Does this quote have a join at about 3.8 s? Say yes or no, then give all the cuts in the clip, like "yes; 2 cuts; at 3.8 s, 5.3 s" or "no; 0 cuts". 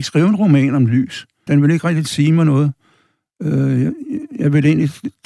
no; 1 cut; at 1.5 s